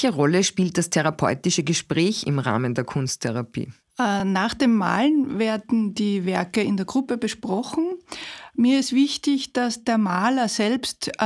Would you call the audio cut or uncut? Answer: uncut